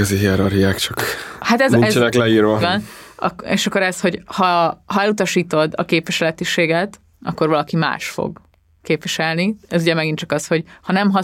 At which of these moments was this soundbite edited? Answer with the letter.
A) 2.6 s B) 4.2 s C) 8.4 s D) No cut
A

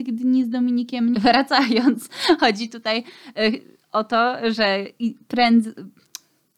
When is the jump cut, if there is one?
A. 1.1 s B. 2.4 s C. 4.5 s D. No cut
A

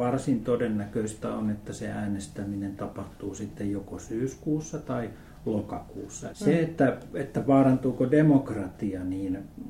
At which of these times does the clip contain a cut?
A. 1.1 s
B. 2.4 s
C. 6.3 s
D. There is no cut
C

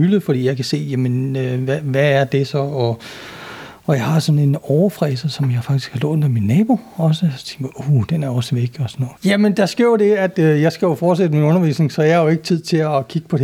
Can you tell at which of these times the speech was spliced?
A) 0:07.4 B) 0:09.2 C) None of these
B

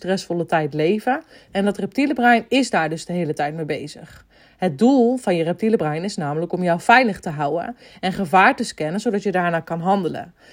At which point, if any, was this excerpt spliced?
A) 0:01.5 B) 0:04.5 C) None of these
A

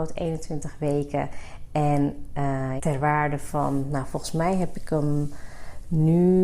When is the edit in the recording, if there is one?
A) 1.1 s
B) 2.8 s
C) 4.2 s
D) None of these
B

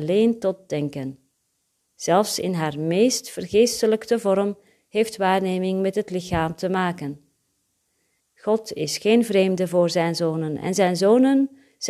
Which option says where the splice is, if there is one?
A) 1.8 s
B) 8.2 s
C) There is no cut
B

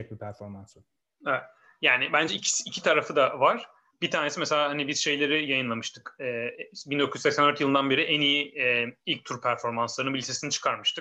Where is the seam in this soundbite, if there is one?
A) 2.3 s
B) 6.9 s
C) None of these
C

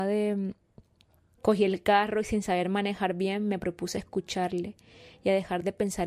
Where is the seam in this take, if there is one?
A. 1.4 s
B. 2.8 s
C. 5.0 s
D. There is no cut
A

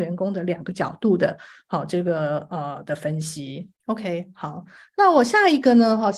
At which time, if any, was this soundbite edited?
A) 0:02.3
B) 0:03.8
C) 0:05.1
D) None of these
B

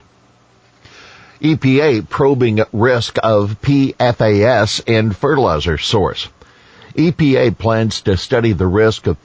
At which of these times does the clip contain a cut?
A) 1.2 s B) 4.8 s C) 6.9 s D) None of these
D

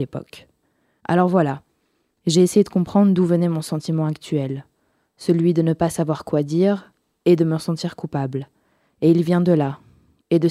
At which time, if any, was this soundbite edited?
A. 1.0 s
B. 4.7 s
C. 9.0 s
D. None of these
A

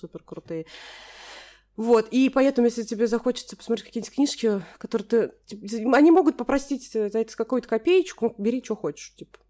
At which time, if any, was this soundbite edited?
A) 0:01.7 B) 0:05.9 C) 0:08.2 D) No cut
C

